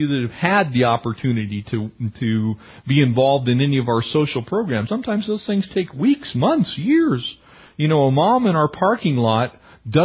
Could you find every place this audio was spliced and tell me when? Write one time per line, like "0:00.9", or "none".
0:04.9